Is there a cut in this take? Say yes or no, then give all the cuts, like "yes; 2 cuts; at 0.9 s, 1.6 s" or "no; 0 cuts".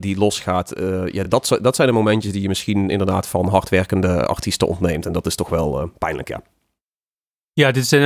no; 0 cuts